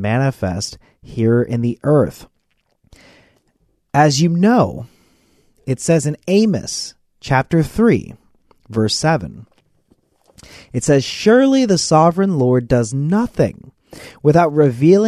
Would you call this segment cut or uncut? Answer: uncut